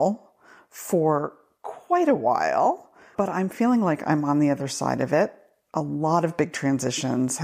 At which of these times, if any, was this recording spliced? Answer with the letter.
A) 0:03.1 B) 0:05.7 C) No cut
A